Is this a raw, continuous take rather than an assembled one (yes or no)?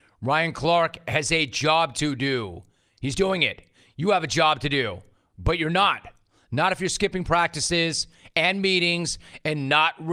yes